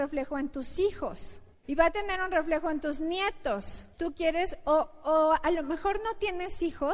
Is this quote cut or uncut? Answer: cut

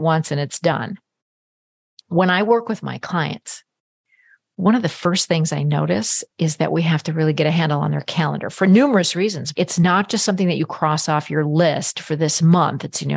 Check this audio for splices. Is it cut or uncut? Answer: cut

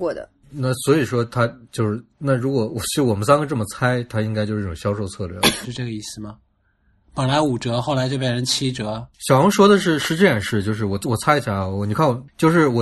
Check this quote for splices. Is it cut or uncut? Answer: cut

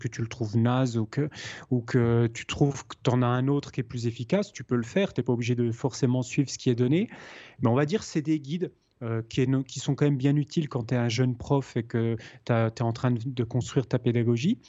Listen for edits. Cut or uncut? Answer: uncut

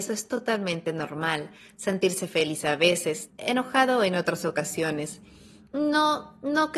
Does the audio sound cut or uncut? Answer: cut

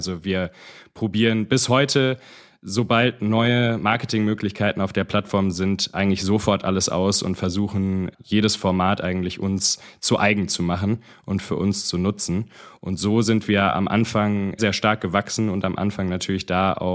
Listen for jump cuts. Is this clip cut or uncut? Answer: cut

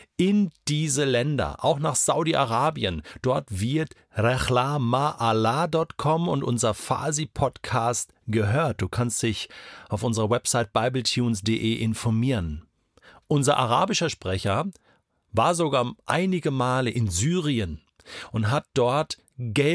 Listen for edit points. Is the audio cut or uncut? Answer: uncut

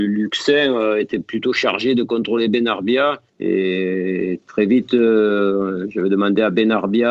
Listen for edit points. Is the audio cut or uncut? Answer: cut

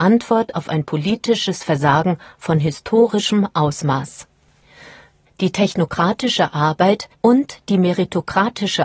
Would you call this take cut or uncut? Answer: cut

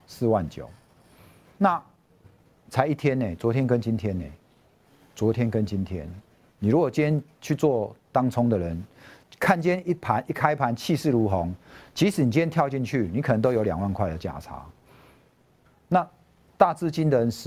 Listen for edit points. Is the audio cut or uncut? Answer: uncut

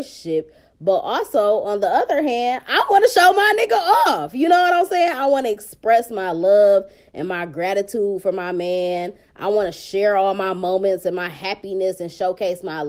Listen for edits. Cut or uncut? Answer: uncut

